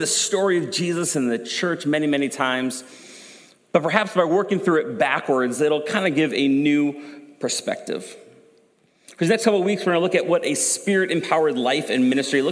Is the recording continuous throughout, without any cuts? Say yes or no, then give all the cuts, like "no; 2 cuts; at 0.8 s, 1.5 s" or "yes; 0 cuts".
yes; 0 cuts